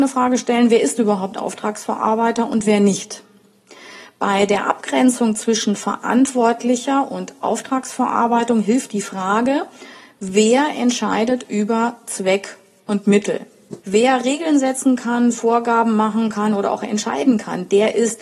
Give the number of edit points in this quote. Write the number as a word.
one